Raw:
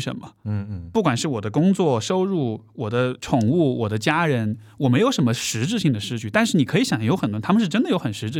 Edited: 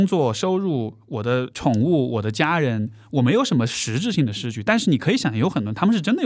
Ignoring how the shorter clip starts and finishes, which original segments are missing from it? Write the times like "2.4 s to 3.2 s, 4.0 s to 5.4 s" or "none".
none